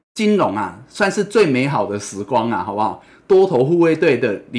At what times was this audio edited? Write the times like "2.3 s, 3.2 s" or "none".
none